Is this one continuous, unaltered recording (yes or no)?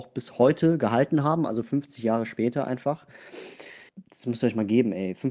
no